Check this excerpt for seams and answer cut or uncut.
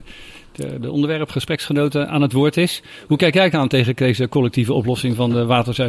uncut